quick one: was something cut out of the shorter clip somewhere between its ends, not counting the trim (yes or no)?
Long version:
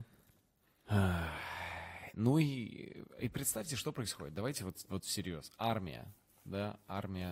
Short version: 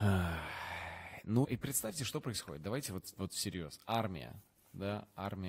yes